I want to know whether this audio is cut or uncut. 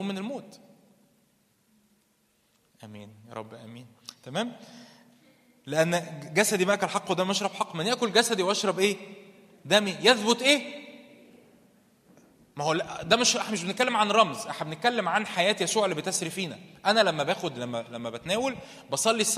uncut